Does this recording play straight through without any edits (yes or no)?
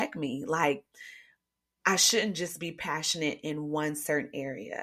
yes